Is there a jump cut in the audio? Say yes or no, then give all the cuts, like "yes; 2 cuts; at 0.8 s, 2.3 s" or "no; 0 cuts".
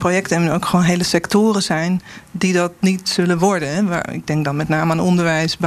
no; 0 cuts